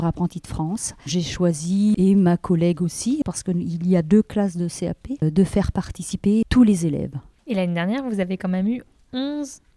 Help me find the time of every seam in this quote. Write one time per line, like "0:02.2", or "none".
0:01.1